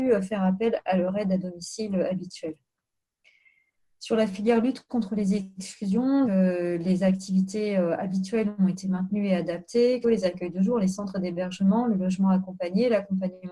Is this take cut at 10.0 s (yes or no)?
yes